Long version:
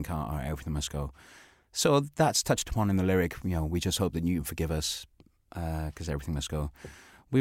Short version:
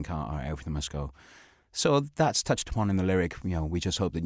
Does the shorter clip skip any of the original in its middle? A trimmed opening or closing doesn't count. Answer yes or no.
no